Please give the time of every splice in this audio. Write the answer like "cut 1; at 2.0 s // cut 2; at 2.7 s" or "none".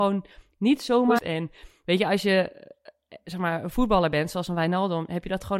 cut 1; at 1.2 s